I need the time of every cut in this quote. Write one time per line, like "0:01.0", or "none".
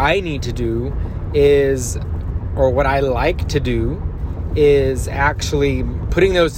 none